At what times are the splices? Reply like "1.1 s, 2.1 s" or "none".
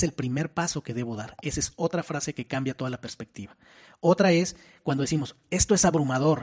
none

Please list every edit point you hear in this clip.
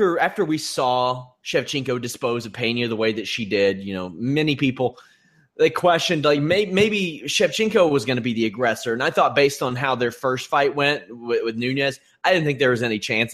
none

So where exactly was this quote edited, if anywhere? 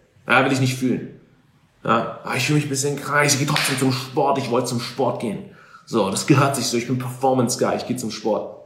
none

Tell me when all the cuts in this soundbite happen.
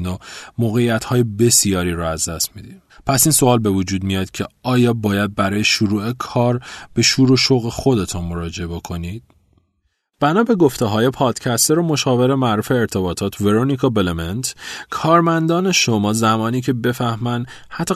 none

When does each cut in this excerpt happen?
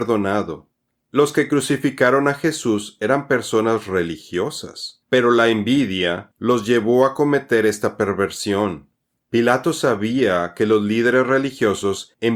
6.3 s

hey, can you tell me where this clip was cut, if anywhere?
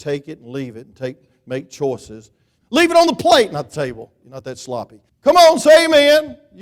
2.6 s, 5.1 s

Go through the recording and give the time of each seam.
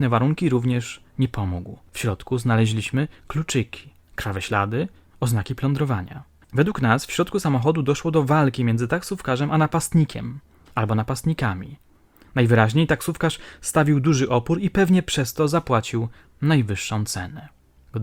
none

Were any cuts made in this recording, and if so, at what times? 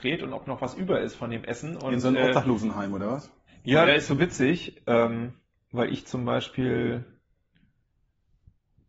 3.9 s

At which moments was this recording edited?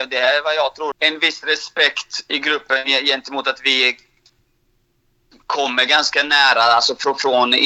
0.9 s

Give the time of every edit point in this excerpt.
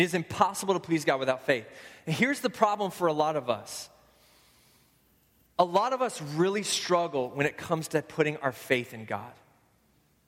none

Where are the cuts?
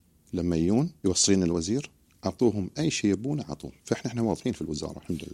1.0 s, 3.8 s

